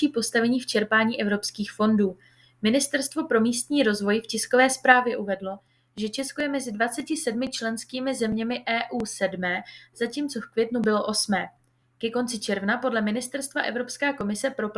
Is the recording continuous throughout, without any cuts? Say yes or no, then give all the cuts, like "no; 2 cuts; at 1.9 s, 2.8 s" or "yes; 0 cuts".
yes; 0 cuts